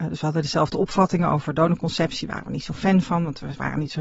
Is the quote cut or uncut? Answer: uncut